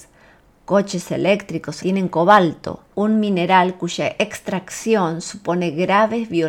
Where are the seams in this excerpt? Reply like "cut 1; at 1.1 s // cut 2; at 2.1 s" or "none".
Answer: cut 1; at 1.8 s // cut 2; at 2.9 s